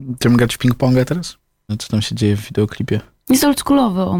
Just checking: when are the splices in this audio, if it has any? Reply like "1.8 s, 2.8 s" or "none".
1.7 s